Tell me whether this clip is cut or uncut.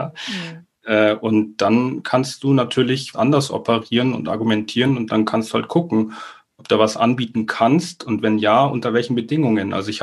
cut